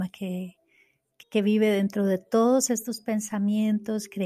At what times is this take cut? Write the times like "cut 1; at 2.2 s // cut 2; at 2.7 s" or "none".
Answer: cut 1; at 1.2 s

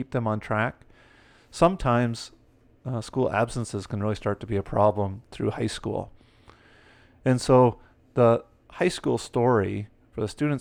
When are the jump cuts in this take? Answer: none

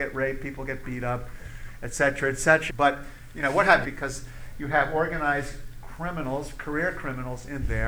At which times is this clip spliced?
cut 1; at 2.7 s // cut 2; at 3.8 s

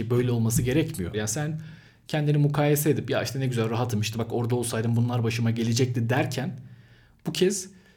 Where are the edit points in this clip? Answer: cut 1; at 1.1 s

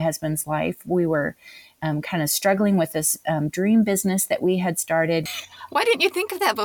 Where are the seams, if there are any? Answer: cut 1; at 5.3 s

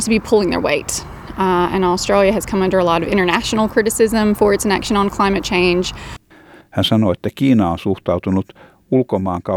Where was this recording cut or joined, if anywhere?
cut 1; at 6.6 s

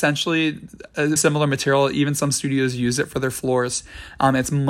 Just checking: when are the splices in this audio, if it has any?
cut 1; at 1.2 s

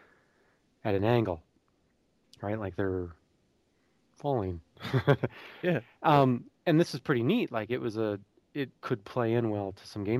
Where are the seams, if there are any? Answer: cut 1; at 6.6 s // cut 2; at 8.7 s

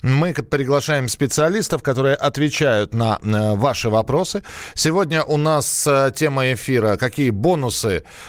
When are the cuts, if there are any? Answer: none

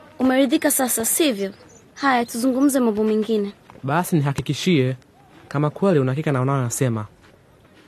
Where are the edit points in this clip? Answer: none

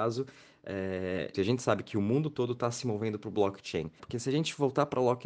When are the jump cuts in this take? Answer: cut 1; at 1.3 s // cut 2; at 4.0 s

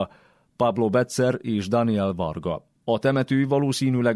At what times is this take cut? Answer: cut 1; at 2.8 s

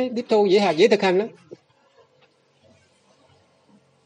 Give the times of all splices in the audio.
none

